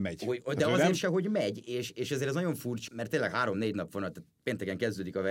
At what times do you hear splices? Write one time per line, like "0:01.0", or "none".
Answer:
0:02.9